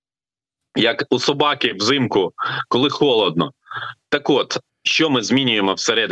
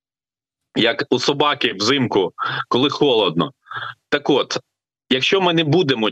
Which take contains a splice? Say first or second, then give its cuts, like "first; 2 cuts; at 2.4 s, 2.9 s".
first; 1 cut; at 4.7 s